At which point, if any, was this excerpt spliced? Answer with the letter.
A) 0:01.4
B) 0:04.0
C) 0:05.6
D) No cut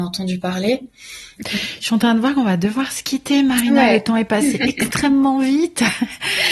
A